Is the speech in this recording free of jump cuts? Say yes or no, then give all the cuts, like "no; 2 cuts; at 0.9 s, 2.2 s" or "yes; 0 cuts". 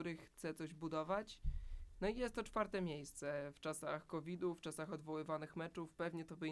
yes; 0 cuts